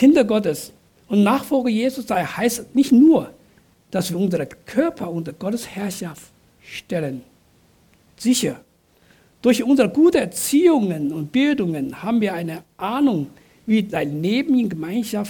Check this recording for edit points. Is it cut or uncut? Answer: cut